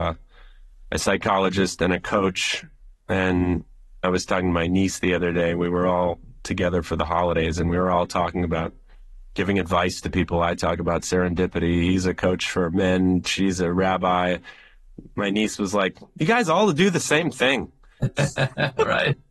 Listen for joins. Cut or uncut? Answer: uncut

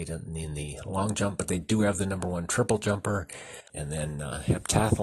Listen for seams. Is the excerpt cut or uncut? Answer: cut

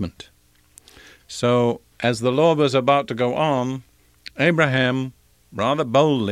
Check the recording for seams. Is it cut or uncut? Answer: cut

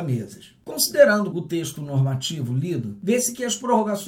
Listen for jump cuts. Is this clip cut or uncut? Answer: cut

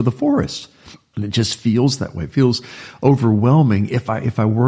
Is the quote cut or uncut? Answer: cut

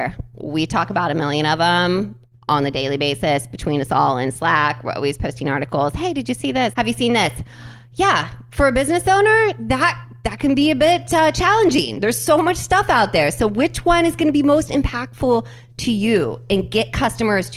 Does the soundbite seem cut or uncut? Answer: cut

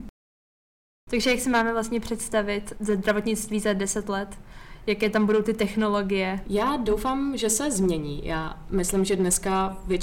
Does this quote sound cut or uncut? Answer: cut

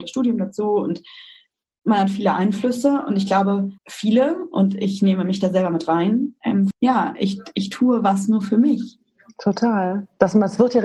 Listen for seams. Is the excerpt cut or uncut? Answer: cut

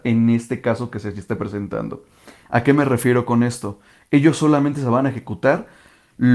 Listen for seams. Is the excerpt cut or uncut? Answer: cut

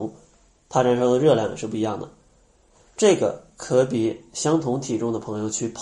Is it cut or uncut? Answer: uncut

